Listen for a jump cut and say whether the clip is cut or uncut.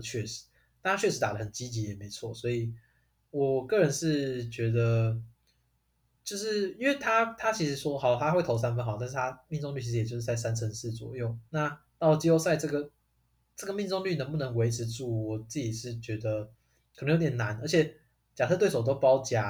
cut